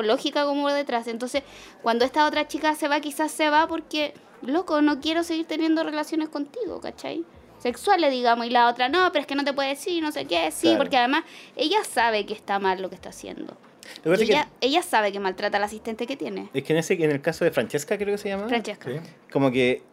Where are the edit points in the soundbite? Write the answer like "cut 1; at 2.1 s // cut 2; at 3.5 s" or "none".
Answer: none